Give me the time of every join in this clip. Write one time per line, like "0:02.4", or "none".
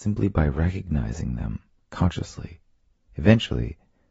0:03.1